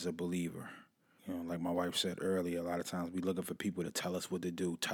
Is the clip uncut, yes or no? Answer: no